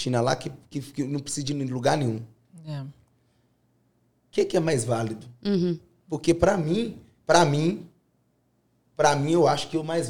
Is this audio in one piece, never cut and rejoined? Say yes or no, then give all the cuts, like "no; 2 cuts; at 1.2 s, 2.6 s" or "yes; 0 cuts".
yes; 0 cuts